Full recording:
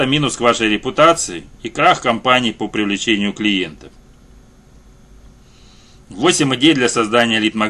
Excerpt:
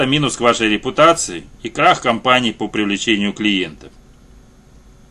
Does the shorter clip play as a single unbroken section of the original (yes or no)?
yes